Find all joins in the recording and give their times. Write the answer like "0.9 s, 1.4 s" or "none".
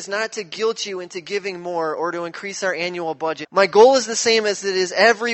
3.4 s